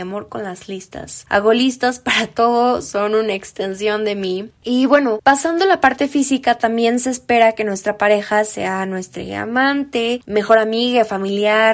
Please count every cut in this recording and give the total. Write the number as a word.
two